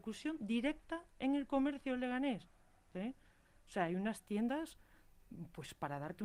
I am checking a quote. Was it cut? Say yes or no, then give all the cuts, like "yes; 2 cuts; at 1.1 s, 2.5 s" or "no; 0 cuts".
yes; 1 cut; at 2.9 s